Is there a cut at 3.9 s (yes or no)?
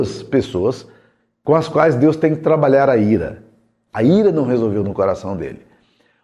yes